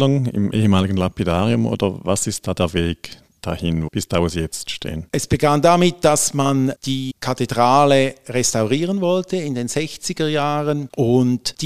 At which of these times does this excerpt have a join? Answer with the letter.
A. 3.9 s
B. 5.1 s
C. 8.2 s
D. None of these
A